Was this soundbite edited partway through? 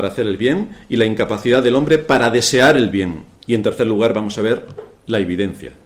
yes; 1 cut; at 3.4 s

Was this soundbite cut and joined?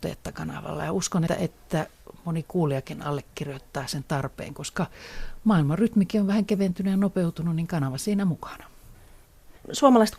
yes; 1 cut; at 1.3 s

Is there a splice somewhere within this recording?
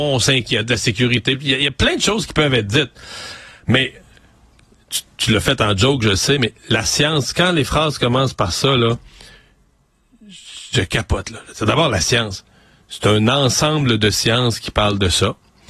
no; 0 cuts

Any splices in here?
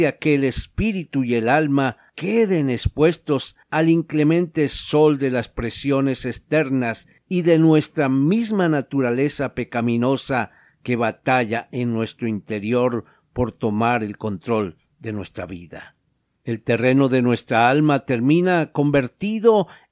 no; 0 cuts

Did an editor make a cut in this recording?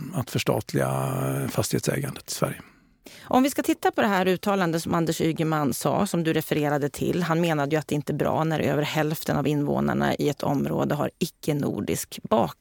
no; 0 cuts

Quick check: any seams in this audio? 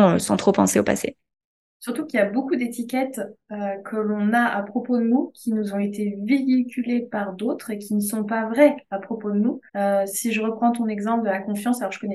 yes; 1 cut; at 9.7 s

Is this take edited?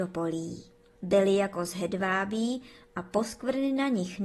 yes; 1 cut; at 1.0 s

